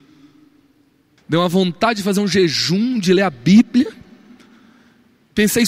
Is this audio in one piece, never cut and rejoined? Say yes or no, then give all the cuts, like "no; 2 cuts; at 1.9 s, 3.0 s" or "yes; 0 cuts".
no; 1 cut; at 1.2 s